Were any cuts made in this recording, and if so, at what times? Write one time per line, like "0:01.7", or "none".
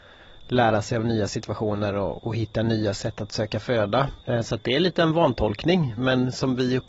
0:04.2